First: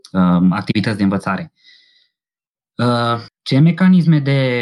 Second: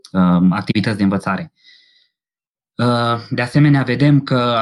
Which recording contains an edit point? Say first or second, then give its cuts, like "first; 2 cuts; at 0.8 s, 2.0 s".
first; 1 cut; at 3.3 s